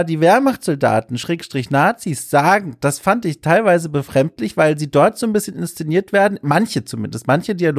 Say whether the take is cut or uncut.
uncut